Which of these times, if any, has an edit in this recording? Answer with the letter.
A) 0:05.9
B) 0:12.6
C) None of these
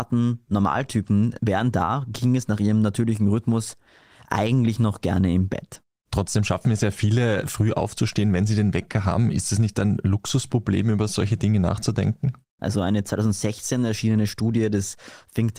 B